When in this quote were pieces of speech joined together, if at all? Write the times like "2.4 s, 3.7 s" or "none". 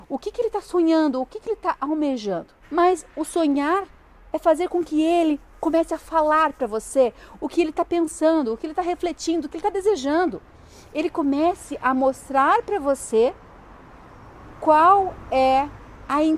2.6 s